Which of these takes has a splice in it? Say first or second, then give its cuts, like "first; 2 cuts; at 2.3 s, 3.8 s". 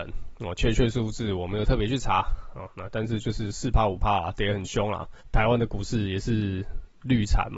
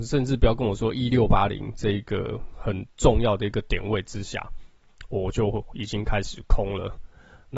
first; 1 cut; at 5.2 s